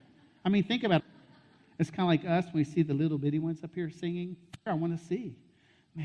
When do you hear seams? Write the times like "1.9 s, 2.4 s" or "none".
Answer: 1.0 s, 4.7 s